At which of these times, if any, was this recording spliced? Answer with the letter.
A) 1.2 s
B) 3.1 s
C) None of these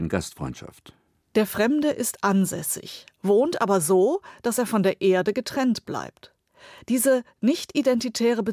C